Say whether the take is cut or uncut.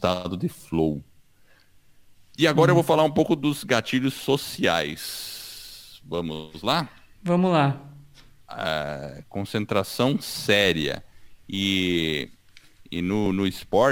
cut